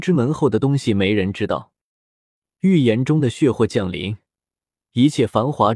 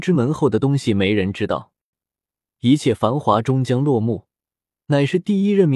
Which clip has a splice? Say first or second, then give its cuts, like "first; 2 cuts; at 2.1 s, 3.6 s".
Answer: second; 1 cut; at 1.9 s